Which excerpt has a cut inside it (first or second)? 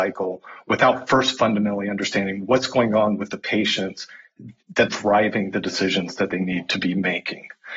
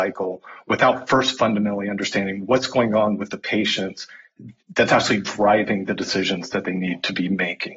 first